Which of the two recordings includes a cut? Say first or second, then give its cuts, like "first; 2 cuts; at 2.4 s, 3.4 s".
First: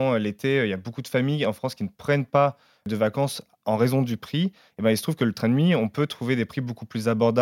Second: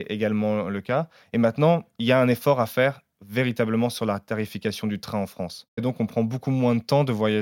second; 1 cut; at 5.8 s